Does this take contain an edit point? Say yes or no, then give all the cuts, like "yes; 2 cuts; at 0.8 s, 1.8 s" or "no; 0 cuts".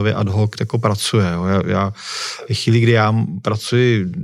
no; 0 cuts